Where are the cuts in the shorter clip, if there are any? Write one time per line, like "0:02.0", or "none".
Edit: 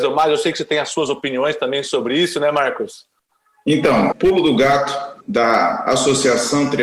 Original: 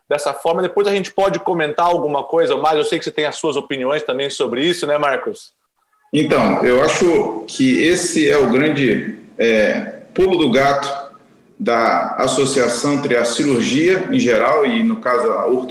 0:04.1
0:05.2